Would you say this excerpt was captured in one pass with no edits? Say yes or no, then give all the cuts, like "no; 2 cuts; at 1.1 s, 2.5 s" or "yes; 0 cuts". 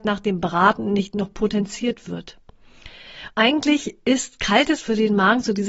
no; 1 cut; at 3.3 s